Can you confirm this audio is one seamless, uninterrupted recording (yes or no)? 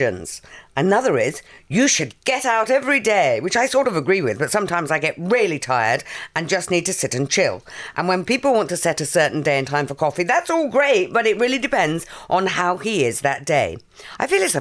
yes